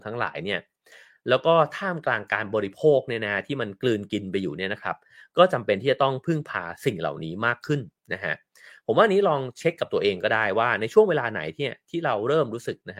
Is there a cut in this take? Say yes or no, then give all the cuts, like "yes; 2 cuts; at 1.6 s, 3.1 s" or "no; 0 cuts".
no; 0 cuts